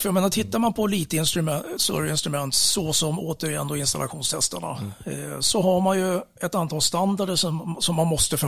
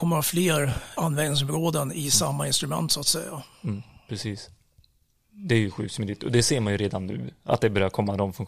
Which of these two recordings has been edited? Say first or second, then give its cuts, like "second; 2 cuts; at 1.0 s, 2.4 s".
second; 1 cut; at 1.0 s